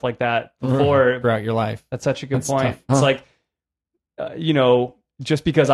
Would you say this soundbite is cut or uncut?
cut